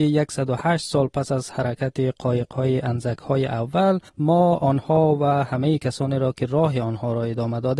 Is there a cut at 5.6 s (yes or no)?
no